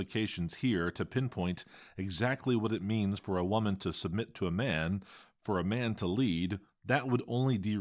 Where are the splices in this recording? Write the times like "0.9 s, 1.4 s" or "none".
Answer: 6.7 s